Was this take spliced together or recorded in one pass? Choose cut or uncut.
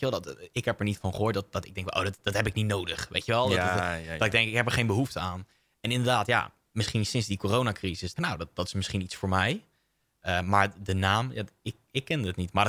cut